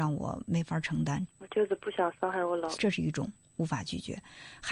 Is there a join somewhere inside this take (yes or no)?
yes